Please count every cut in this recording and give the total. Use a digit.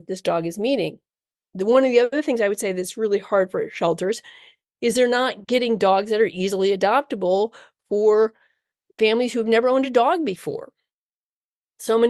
0